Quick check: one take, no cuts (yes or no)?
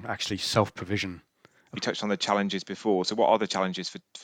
no